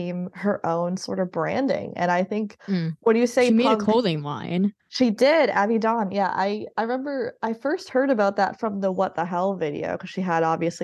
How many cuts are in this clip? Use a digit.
0